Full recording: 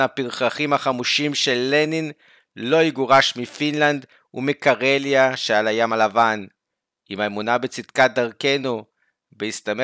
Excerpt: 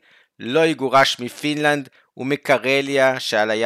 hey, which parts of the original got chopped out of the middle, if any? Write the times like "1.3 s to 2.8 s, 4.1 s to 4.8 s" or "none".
none